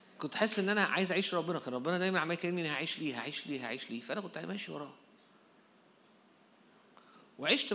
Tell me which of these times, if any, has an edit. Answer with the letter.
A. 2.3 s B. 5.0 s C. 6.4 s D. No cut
D